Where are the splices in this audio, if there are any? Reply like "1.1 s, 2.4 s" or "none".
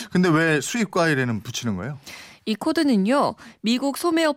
none